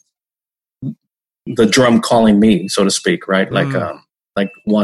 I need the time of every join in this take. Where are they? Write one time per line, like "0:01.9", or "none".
none